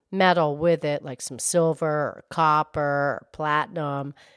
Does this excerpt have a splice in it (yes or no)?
no